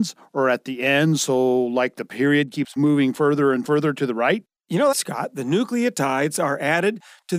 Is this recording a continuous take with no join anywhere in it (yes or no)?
no